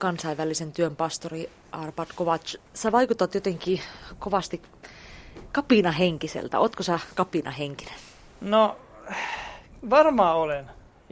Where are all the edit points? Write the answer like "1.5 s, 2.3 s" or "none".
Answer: none